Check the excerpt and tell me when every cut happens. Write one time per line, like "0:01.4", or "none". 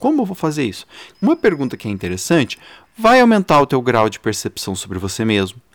0:01.1